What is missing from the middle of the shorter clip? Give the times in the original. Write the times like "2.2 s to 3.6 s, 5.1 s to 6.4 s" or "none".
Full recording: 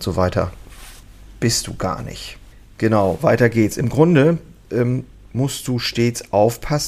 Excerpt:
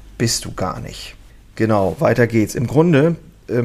none